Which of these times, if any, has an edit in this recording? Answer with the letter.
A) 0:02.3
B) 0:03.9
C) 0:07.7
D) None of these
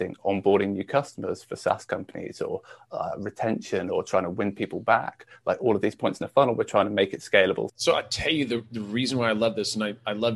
C